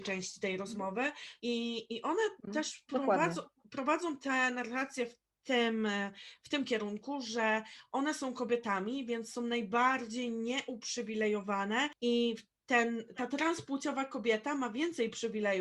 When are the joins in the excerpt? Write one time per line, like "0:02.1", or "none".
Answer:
0:01.4